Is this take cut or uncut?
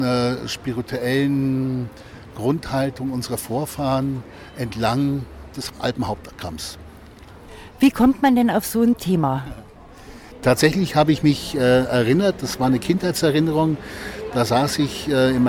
uncut